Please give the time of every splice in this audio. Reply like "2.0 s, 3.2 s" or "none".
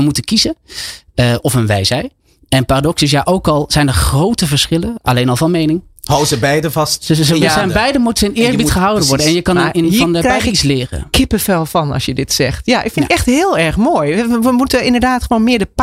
none